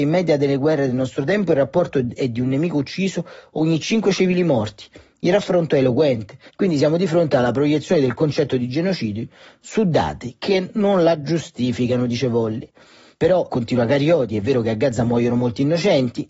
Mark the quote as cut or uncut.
cut